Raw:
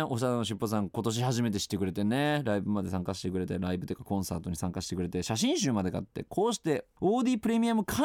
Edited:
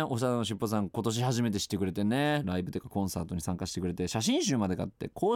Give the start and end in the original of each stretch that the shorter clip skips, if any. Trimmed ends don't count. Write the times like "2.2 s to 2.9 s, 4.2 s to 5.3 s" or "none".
2.4 s to 3.6 s